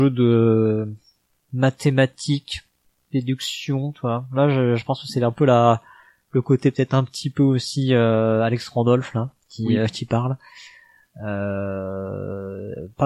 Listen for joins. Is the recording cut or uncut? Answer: uncut